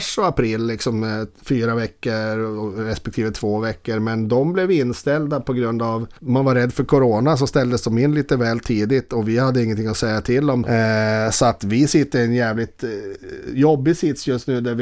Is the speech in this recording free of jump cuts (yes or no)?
no